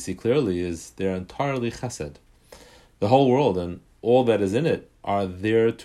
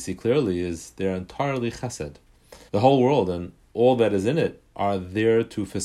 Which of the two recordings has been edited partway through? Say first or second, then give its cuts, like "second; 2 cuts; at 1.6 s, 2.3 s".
second; 1 cut; at 2.7 s